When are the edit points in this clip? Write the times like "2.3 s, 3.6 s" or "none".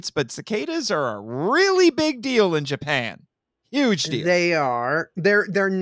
none